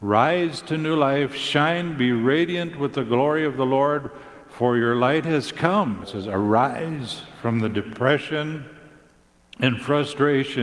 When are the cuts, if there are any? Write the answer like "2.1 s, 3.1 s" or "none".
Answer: 6.0 s